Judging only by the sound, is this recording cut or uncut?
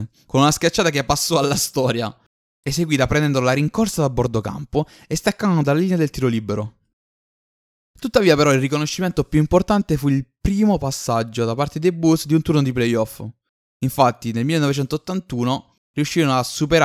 uncut